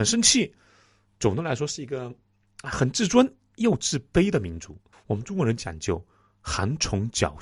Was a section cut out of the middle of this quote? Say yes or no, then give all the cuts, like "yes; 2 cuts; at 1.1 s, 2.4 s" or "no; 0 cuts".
yes; 1 cut; at 4.9 s